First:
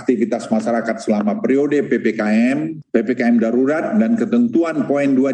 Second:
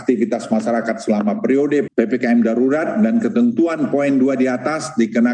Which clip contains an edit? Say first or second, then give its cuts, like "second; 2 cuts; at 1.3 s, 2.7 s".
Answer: second; 1 cut; at 1.9 s